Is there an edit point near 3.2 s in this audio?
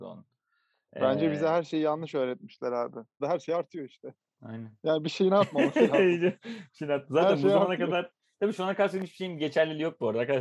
yes; 1 cut; at 3.2 s

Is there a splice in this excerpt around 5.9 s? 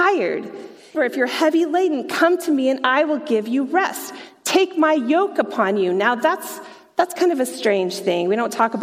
no; 1 cut; at 0.9 s

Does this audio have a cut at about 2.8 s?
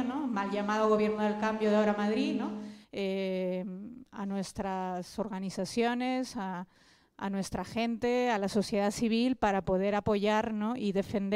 yes; 1 cut; at 2.8 s

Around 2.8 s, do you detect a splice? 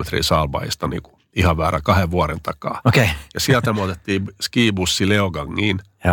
no; 0 cuts

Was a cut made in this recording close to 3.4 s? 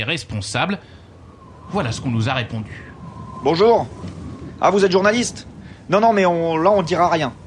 no; 0 cuts

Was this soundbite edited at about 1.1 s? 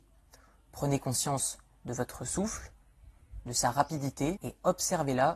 no; 1 cut; at 4.4 s

